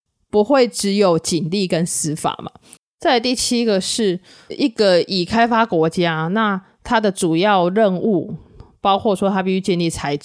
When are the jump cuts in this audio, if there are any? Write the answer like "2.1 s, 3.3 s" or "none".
2.8 s